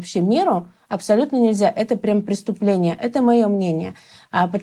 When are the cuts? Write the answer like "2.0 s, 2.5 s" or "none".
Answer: none